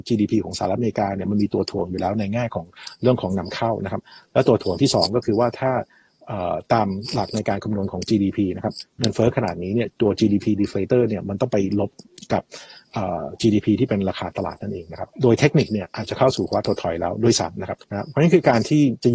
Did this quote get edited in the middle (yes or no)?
yes